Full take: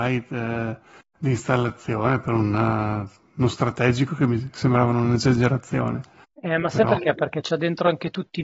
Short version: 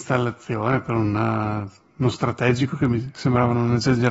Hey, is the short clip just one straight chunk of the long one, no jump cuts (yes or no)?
yes